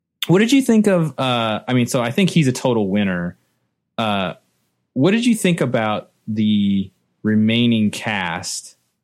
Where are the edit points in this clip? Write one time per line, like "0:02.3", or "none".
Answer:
none